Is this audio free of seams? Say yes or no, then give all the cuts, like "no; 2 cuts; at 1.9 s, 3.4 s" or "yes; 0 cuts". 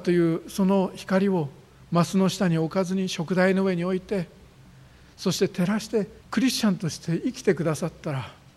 no; 1 cut; at 6.2 s